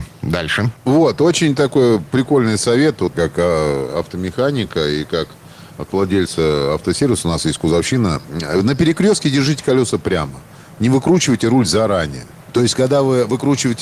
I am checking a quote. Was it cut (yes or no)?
yes